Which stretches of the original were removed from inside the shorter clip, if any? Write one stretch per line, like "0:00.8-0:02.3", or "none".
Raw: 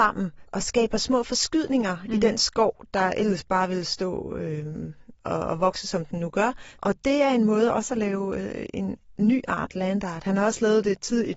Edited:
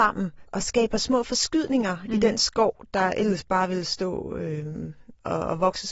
none